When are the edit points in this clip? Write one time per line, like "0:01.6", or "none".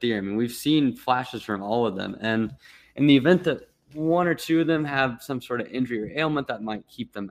none

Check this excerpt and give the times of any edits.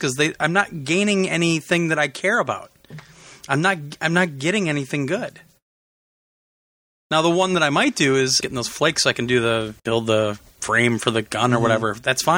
0:08.4
0:09.8

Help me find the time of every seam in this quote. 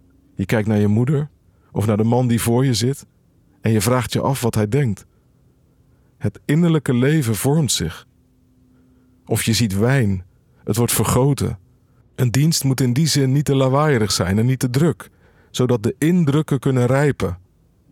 0:12.0

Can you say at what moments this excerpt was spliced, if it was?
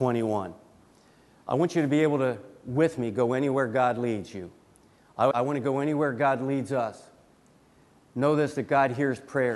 0:05.3

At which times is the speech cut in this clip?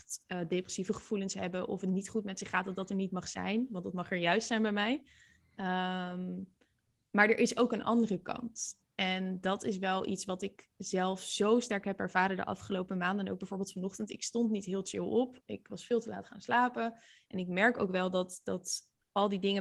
none

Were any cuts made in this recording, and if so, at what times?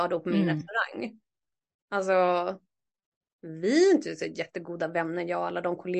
none

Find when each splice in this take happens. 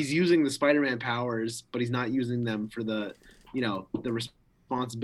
none

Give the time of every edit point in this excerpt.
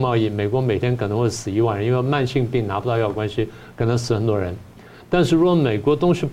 none

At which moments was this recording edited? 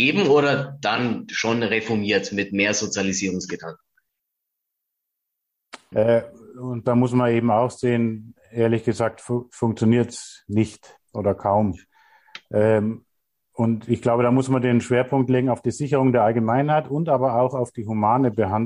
0:05.9

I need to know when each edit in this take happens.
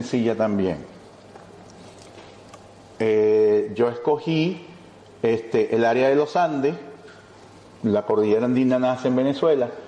0:02.9

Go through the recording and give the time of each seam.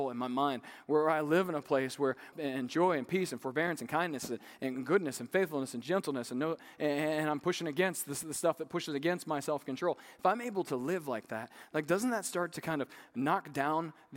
0:02.3

